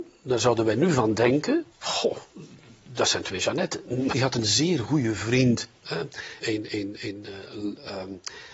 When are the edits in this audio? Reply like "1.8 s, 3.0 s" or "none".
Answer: 1.7 s, 4.1 s, 6.4 s